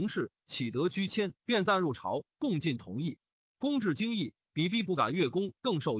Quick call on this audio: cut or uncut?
cut